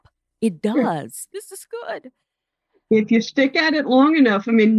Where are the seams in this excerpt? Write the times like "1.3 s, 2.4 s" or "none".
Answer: 1.3 s